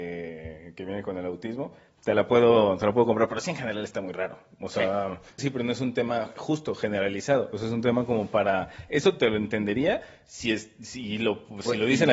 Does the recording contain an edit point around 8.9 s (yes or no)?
no